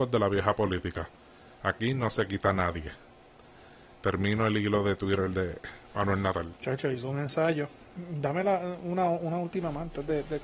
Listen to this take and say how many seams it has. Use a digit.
1